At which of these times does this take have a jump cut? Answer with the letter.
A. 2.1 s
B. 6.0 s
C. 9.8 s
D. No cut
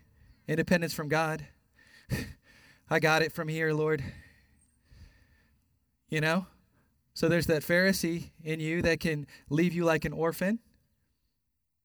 D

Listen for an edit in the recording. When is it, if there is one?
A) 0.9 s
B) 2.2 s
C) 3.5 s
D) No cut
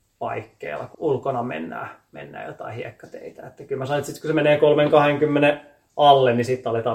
A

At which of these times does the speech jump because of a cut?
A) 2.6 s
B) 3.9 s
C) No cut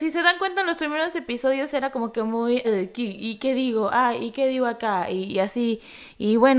A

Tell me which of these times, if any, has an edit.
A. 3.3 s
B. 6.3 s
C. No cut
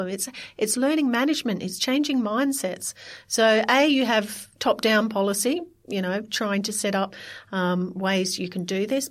C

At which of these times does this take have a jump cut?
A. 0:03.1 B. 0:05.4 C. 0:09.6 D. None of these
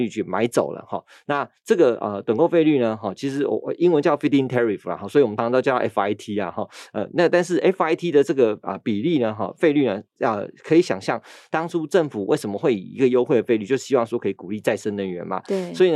B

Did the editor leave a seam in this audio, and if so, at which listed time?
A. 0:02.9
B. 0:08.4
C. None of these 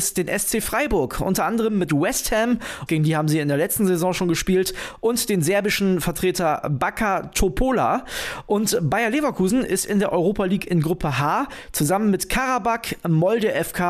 A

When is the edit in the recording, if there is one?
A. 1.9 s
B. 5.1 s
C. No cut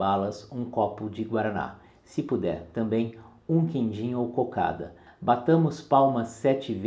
C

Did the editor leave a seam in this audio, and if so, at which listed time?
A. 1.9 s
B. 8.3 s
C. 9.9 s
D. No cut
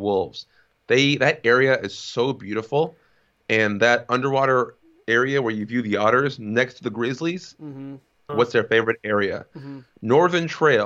B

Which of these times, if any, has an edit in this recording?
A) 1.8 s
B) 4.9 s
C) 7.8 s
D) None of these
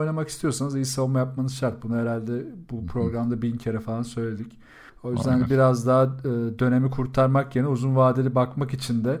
B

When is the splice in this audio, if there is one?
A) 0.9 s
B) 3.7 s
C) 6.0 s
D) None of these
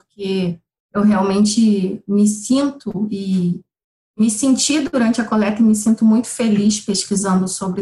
D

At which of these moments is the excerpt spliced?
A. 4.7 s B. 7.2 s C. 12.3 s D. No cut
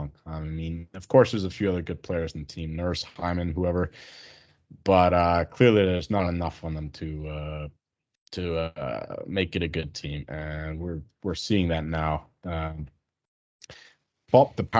D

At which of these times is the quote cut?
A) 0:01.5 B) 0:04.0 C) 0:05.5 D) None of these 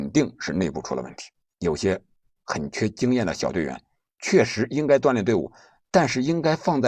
A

